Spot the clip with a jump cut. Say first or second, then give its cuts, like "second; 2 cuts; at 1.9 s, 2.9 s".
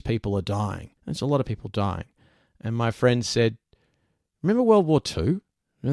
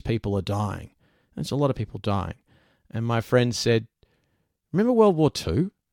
first; 1 cut; at 1.0 s